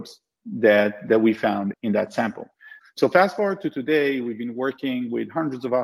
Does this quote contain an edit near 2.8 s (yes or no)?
yes